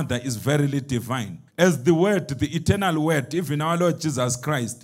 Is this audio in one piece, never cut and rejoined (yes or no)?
no